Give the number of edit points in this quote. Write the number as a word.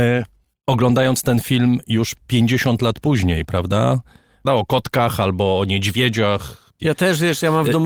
two